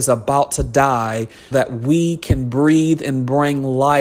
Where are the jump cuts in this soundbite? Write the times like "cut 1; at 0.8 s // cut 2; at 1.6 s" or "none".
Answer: cut 1; at 1.5 s